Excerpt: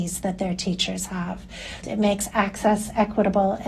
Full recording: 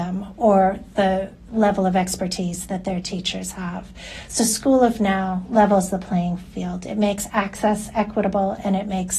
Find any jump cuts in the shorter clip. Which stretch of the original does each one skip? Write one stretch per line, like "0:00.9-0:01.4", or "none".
0:04.3-0:06.8